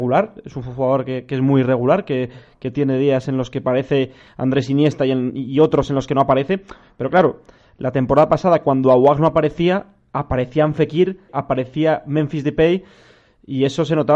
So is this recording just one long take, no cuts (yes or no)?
no